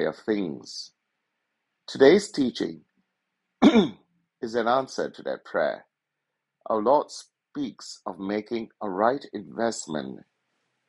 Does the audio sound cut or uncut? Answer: uncut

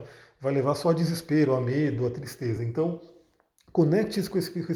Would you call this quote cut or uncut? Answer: uncut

